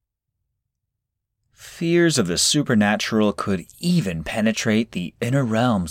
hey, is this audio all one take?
yes; 0 cuts

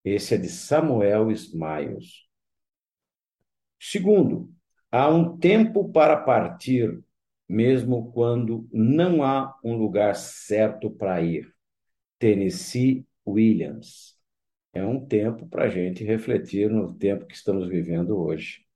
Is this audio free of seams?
yes; 0 cuts

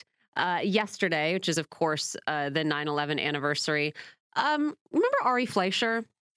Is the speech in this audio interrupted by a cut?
no; 0 cuts

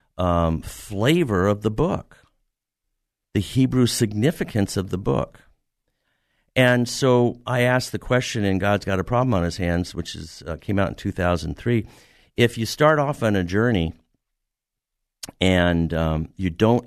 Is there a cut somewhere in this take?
no; 0 cuts

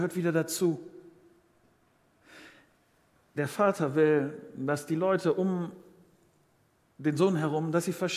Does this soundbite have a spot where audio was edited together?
no; 0 cuts

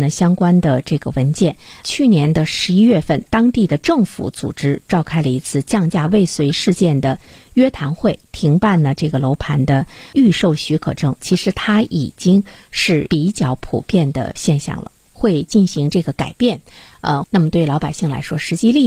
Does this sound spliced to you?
yes; 3 cuts; at 3.3 s, 15.1 s, 17.2 s

